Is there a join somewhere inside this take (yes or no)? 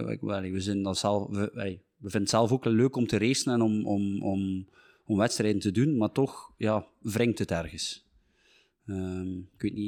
no